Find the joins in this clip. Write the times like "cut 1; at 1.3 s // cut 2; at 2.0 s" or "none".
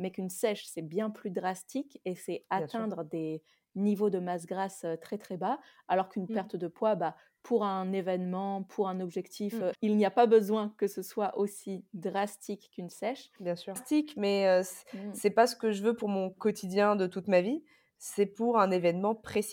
cut 1; at 9.7 s // cut 2; at 13.8 s